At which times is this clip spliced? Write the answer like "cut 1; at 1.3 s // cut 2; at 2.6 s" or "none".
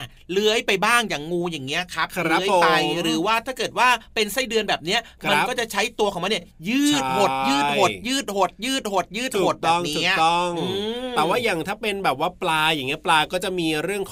none